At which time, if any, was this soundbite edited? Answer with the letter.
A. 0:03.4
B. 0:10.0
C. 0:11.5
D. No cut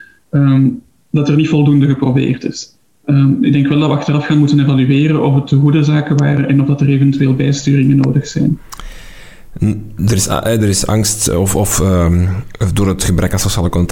D